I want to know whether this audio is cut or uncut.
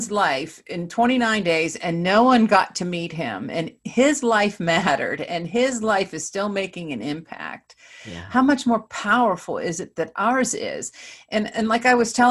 uncut